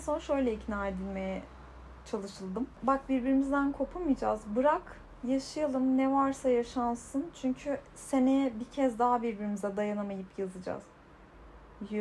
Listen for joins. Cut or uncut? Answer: uncut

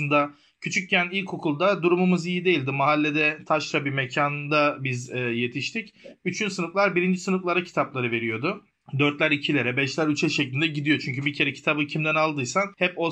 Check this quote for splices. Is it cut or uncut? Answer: uncut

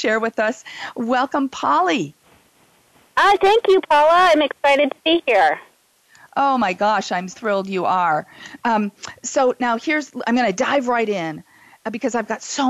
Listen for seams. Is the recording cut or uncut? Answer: cut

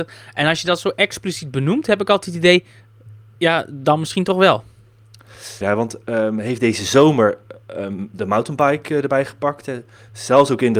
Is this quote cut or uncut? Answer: cut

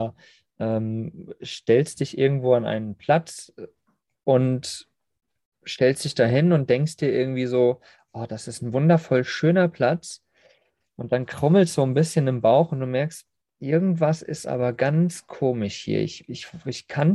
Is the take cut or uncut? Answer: uncut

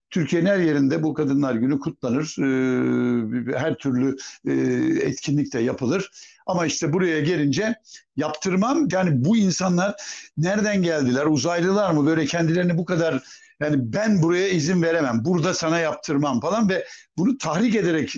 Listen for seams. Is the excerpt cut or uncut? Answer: cut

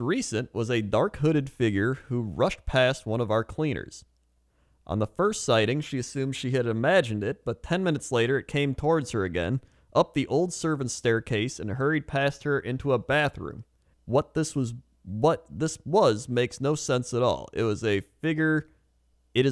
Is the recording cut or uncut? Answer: cut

